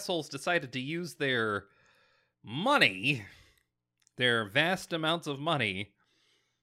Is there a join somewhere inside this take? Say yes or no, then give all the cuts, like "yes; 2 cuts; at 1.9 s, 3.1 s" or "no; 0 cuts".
no; 0 cuts